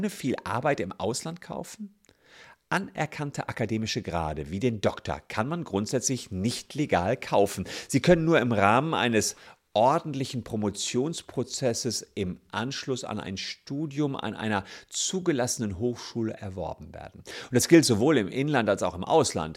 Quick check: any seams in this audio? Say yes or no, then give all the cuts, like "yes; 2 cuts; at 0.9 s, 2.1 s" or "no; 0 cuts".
no; 0 cuts